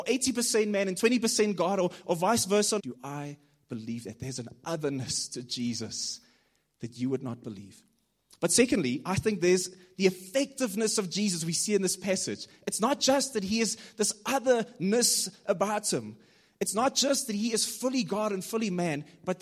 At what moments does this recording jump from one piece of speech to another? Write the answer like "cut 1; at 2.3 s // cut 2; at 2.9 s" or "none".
cut 1; at 2.8 s